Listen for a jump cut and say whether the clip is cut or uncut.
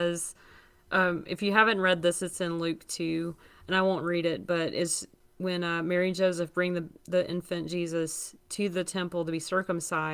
uncut